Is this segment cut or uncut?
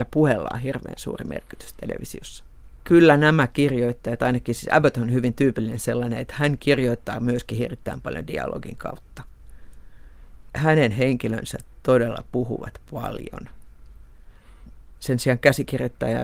cut